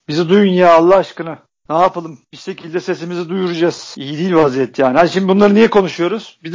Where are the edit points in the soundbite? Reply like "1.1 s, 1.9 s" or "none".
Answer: none